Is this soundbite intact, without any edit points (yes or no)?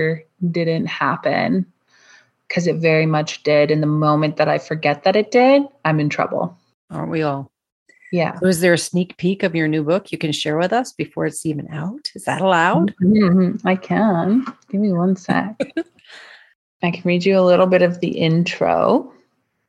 yes